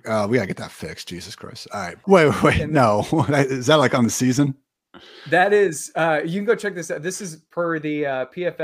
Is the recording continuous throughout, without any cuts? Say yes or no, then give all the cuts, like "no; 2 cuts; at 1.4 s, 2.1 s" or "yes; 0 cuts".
no; 1 cut; at 2.0 s